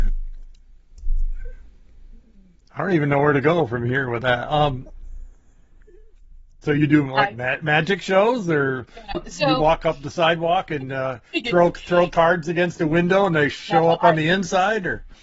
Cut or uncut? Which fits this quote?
cut